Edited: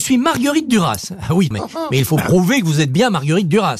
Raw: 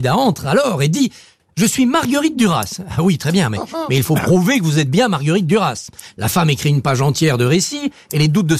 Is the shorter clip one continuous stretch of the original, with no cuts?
no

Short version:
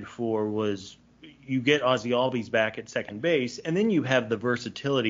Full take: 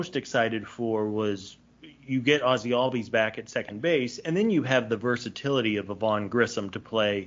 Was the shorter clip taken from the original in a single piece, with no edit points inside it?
yes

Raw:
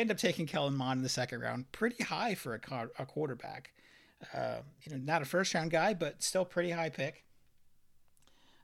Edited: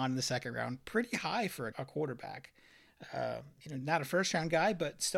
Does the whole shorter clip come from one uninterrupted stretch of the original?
no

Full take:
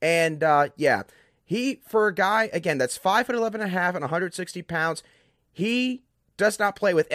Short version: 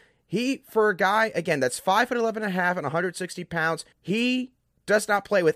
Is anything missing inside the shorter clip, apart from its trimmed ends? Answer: yes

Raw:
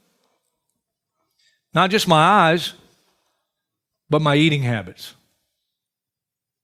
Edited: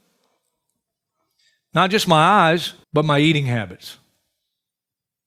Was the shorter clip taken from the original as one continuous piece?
no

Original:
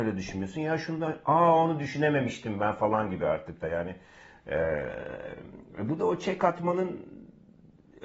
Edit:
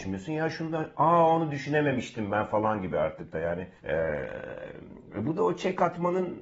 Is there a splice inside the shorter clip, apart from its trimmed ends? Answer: yes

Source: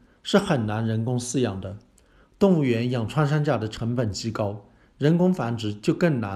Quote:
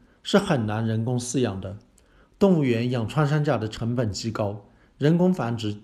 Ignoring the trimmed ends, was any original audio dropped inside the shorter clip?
no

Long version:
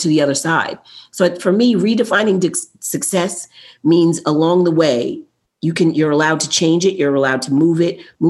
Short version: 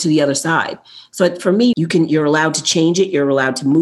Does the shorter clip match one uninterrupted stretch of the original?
no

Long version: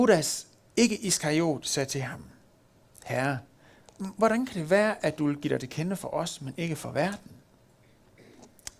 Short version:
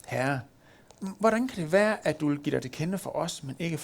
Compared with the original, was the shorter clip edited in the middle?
no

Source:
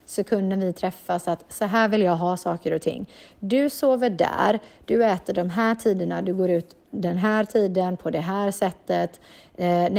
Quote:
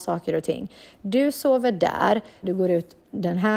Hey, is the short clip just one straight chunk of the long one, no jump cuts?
no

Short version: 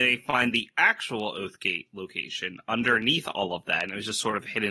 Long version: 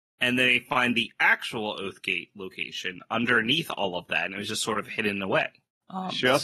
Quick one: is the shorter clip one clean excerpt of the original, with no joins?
yes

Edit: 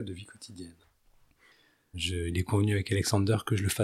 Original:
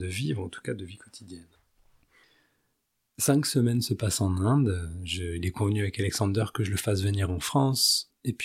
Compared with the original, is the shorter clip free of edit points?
no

